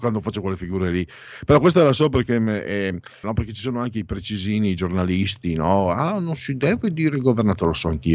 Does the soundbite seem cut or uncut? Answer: cut